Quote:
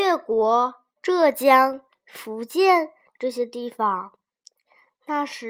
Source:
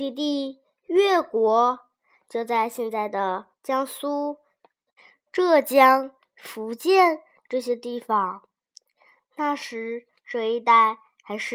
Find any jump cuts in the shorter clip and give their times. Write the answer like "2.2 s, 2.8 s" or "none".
0.9 s